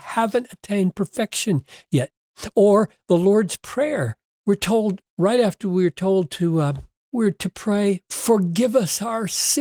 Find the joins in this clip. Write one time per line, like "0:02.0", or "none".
0:07.0